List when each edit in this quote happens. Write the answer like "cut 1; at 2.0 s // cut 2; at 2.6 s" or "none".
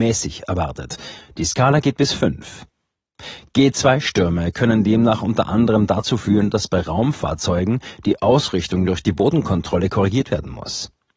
none